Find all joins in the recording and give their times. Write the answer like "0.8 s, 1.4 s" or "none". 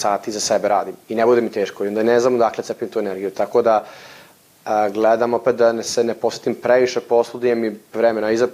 none